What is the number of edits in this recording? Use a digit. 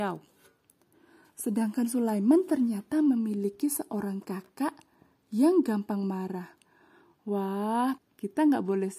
1